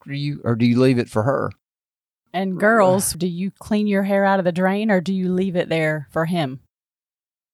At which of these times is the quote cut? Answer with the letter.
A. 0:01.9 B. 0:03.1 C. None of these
B